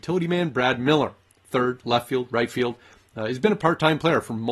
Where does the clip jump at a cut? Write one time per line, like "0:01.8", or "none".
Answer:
0:01.4